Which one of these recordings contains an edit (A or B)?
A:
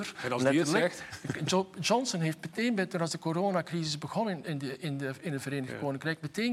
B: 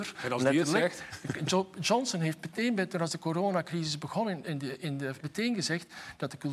B